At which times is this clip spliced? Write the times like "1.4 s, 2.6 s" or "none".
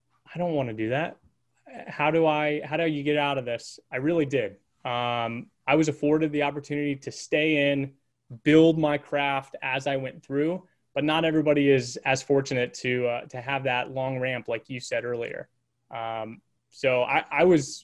3.8 s